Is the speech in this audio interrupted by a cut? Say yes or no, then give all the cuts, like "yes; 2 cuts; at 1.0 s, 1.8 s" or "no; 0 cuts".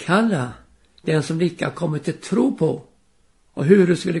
no; 0 cuts